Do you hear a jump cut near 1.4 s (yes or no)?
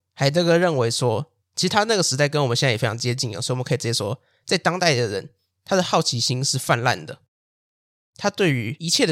yes